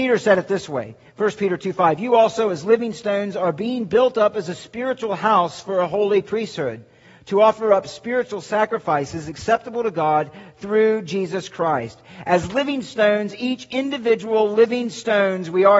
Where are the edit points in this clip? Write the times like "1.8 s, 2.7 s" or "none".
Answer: none